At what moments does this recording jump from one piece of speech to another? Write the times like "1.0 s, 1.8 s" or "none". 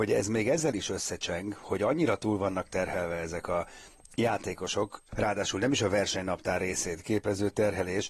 5.1 s